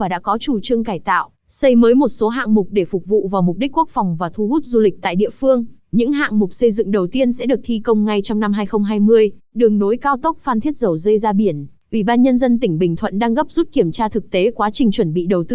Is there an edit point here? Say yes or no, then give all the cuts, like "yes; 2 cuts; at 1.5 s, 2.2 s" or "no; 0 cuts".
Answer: yes; 2 cuts; at 5.8 s, 9.4 s